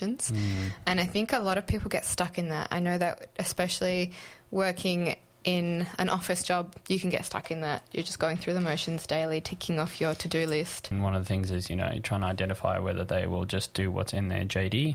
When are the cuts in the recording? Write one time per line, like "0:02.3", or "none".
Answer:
0:06.8
0:10.9